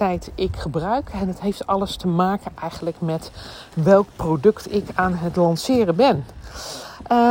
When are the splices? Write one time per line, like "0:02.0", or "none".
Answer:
none